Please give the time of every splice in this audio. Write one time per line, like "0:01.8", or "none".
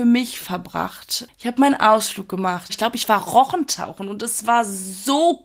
0:02.7